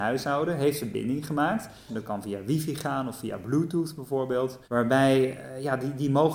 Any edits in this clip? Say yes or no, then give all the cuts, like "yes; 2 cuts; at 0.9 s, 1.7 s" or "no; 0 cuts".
yes; 2 cuts; at 1.9 s, 4.6 s